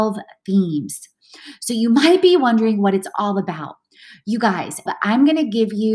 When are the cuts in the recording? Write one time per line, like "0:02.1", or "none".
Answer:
0:04.9